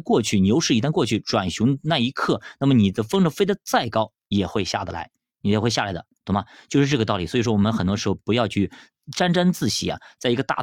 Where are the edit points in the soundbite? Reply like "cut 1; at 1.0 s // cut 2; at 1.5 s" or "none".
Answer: none